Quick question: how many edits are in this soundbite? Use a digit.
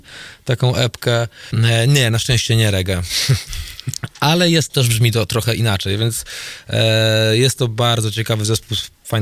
2